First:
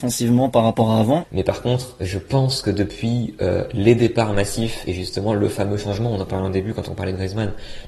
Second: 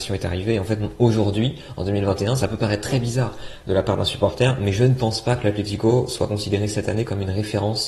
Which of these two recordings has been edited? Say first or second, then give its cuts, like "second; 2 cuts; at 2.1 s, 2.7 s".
first; 1 cut; at 1.2 s